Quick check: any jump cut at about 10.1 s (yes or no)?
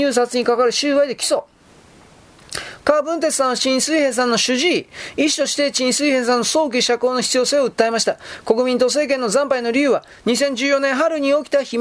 no